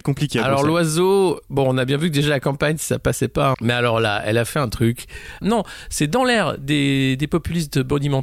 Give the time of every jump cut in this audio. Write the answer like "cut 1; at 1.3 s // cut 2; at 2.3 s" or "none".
cut 1; at 3.5 s // cut 2; at 5.4 s